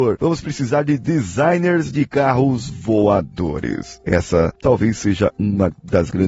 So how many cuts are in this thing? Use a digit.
0